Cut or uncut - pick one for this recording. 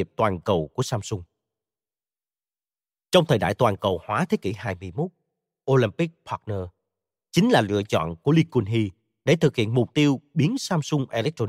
uncut